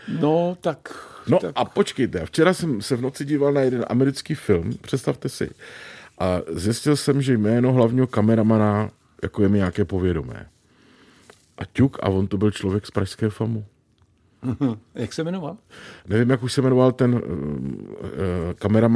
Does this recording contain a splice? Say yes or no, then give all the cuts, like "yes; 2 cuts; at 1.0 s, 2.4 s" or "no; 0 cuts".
no; 0 cuts